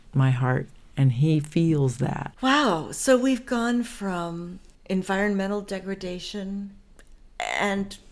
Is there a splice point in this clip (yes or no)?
yes